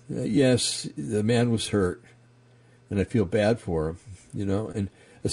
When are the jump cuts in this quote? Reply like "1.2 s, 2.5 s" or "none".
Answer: none

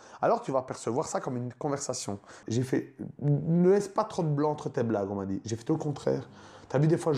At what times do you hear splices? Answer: 2.4 s

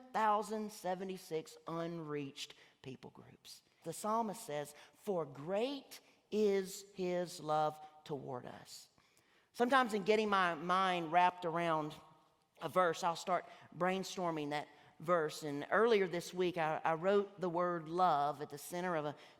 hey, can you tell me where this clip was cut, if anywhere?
3.8 s

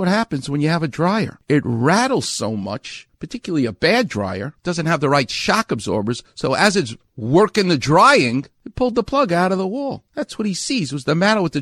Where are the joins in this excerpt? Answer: none

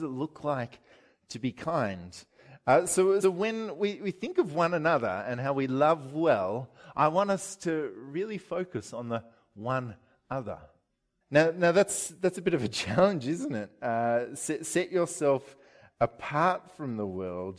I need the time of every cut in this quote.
3.2 s, 11.2 s

